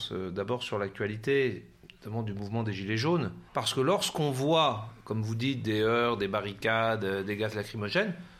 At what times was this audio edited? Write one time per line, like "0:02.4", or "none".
0:03.5